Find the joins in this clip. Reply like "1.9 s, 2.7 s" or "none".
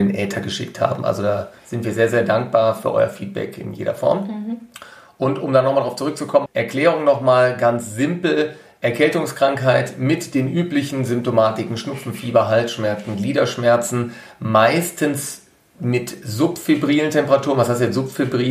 6.5 s